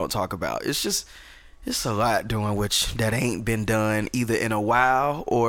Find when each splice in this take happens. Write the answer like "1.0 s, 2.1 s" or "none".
none